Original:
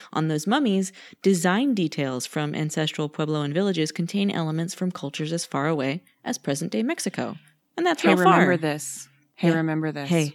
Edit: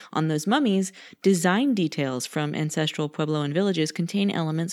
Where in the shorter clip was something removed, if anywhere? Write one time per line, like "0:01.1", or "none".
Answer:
none